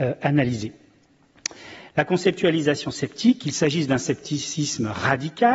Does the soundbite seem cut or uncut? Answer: cut